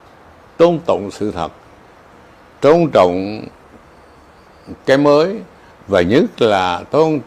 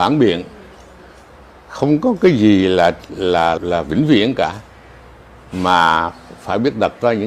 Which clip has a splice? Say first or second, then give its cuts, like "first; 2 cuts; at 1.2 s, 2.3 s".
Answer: second; 1 cut; at 3.6 s